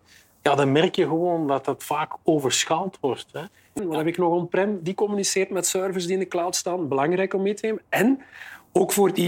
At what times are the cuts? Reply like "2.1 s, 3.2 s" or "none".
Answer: 3.8 s